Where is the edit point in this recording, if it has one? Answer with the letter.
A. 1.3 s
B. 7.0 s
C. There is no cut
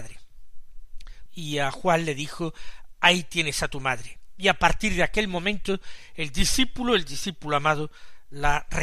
A